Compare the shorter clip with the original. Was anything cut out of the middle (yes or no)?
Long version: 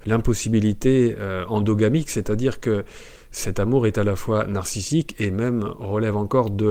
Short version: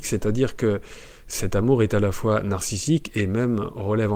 no